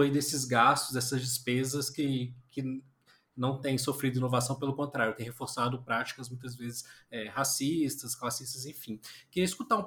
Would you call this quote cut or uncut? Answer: uncut